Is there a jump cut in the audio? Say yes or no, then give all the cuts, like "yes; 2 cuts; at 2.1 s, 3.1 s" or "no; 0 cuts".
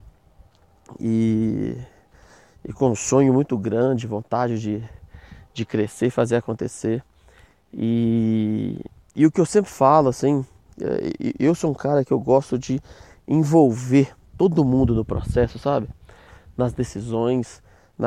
no; 0 cuts